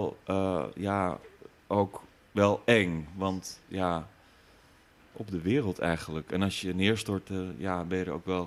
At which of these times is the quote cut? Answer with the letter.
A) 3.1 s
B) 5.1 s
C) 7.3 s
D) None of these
B